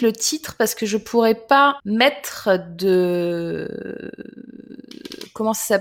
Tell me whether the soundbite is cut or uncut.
cut